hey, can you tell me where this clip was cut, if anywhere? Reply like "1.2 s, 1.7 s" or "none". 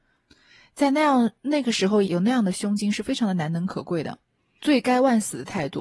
2.0 s, 4.6 s